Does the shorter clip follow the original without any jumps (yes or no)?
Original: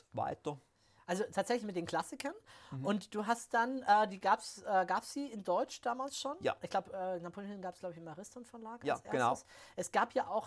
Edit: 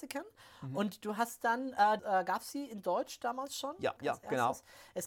no